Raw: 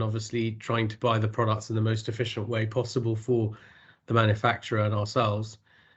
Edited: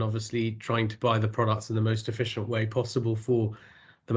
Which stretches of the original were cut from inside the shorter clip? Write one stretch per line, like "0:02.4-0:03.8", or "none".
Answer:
none

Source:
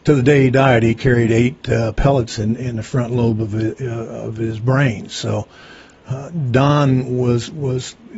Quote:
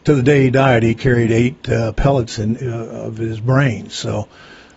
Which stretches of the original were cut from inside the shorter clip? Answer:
0:02.6-0:03.8

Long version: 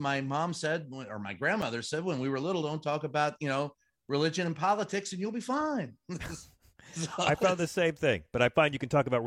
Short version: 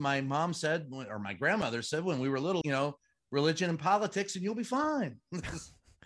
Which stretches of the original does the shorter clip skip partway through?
0:02.6-0:03.4

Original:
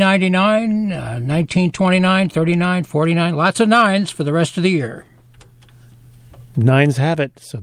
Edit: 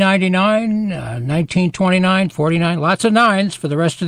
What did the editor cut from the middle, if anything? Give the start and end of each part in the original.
0:02.3-0:02.9

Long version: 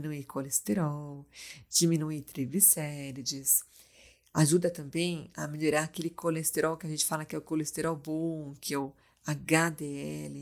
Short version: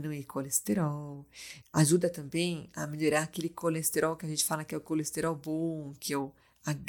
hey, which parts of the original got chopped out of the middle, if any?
0:01.6-0:04.2

